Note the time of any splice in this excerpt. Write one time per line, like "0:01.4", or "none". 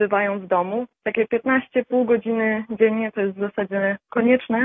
0:01.0

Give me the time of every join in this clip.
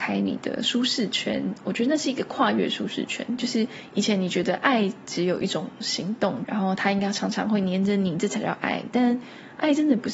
0:06.4

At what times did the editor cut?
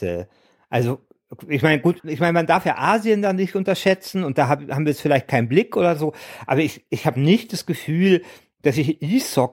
0:02.0

